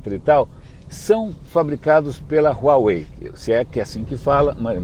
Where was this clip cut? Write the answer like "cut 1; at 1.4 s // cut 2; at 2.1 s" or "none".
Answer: none